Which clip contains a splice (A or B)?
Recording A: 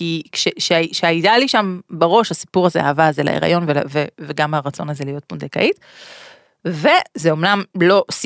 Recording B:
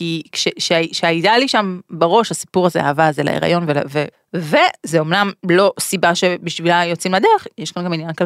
B